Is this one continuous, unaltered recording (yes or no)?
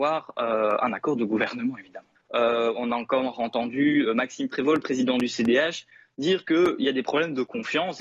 no